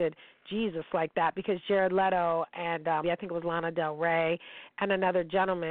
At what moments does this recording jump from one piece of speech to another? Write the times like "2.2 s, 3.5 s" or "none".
3.0 s